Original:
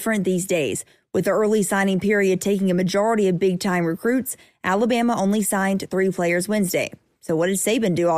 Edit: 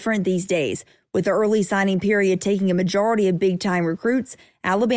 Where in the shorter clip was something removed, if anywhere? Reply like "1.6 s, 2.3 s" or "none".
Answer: none